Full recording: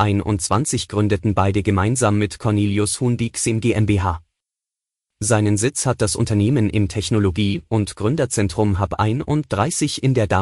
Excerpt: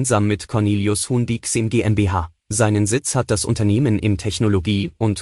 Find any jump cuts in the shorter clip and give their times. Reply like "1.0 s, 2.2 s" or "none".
2.4 s